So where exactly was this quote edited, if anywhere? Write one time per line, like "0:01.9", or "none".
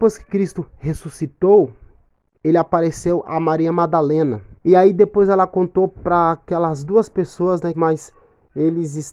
0:04.6
0:07.7